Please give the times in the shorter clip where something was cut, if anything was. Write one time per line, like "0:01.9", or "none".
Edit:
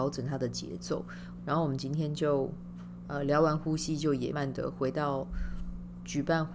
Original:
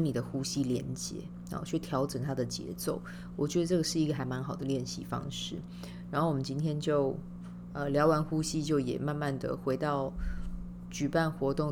0:01.4
0:04.3